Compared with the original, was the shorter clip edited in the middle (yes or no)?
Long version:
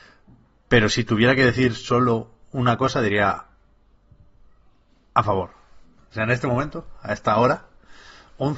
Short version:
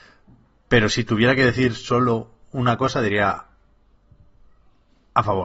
no